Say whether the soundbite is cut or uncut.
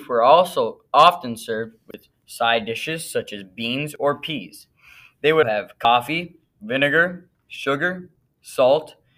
cut